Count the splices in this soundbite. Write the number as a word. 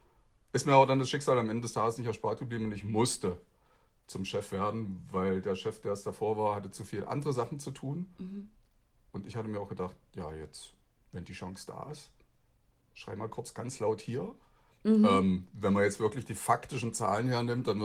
one